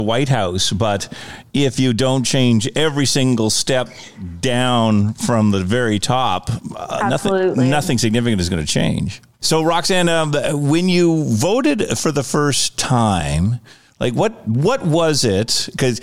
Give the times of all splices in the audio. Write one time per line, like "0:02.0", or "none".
0:09.4